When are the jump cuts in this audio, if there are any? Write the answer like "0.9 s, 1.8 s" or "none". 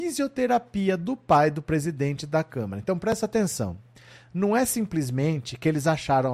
none

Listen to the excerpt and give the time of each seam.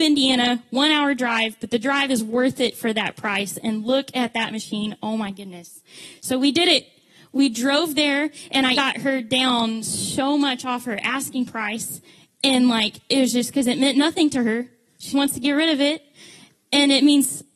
8.7 s, 15.1 s

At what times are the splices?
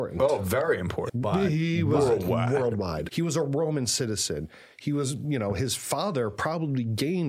1.1 s, 3.1 s

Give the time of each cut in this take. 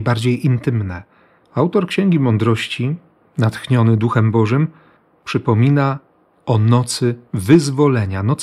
1.4 s

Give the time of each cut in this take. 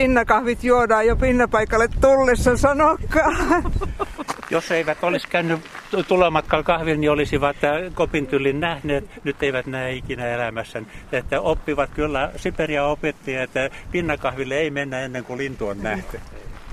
none

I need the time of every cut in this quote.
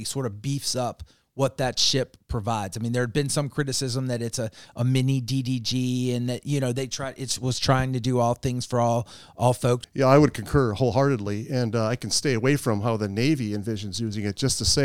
9.8 s

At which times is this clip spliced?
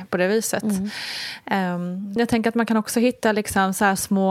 2.2 s

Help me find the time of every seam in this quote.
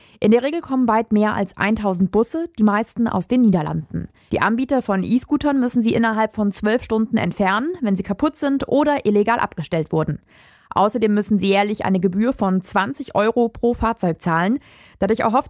4.3 s

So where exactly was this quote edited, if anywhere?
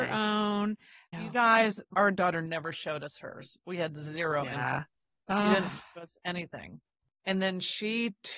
none

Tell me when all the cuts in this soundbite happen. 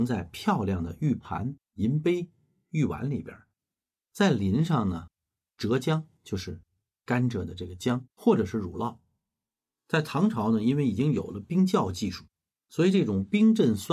8.1 s

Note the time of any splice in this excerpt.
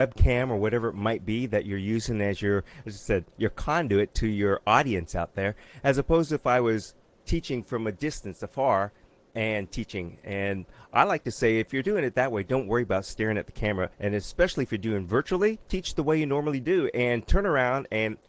13.9 s, 15.7 s

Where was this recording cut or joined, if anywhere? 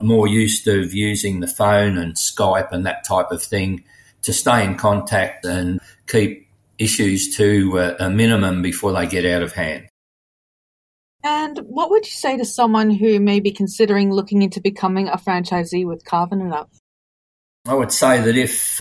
5.4 s

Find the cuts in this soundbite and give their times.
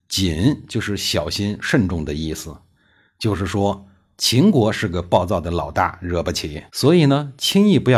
6.7 s

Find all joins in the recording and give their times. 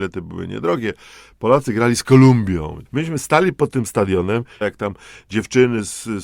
2.8 s, 4.6 s

